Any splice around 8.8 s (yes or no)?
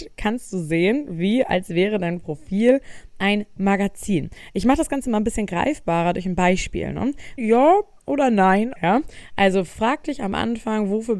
yes